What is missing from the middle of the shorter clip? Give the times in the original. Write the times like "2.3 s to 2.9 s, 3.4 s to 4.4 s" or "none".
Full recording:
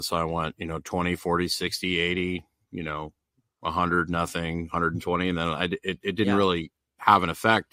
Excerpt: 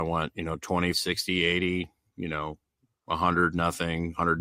1.2 s to 1.5 s